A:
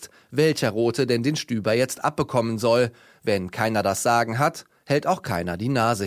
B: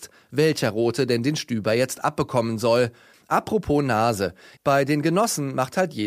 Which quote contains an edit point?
B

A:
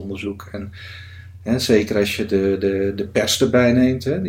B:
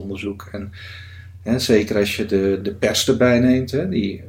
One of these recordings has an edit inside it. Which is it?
B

